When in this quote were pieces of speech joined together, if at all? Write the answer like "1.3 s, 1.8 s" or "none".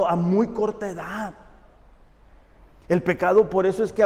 none